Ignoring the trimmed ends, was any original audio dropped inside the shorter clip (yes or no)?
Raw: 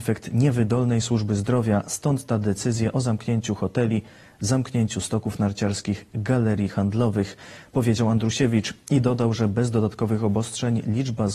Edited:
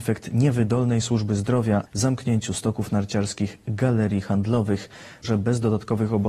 yes